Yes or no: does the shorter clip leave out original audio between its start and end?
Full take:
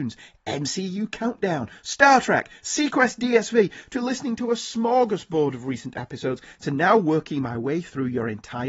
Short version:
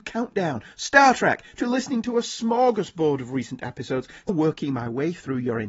yes